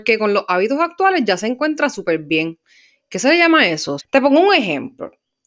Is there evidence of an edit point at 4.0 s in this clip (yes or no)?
yes